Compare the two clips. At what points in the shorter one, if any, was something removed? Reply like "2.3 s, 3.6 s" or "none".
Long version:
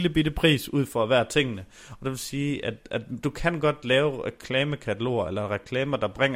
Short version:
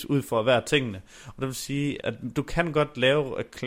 2.0 s